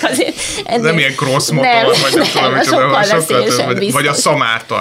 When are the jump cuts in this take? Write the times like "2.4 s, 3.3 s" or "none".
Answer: none